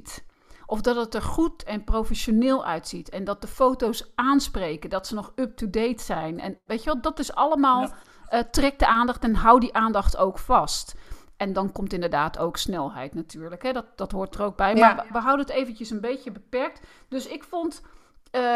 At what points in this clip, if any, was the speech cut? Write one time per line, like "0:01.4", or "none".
none